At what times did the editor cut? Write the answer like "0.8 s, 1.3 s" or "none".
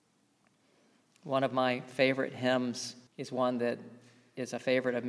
3.1 s